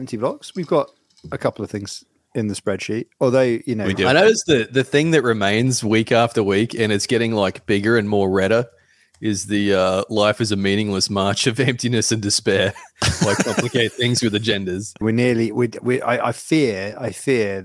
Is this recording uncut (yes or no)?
no